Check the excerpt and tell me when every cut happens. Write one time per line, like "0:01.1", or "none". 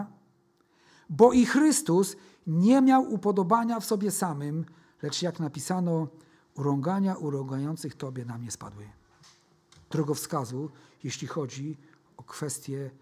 0:09.9